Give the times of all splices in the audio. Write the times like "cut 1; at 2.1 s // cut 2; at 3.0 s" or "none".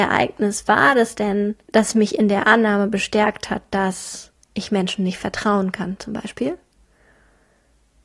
cut 1; at 1.6 s